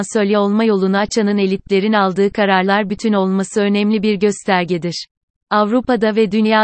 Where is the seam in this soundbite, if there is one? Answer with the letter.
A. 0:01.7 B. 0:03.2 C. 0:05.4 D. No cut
C